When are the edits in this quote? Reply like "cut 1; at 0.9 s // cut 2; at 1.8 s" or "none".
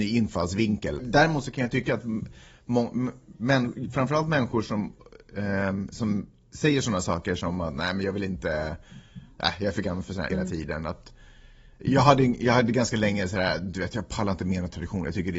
cut 1; at 1.0 s // cut 2; at 10.3 s